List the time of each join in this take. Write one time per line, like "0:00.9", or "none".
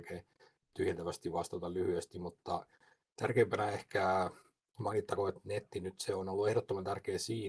none